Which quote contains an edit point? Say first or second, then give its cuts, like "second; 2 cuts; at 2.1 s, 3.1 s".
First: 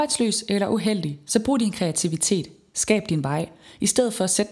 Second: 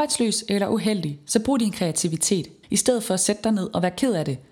second; 1 cut; at 2.6 s